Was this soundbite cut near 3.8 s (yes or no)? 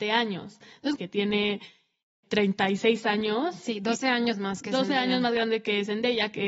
no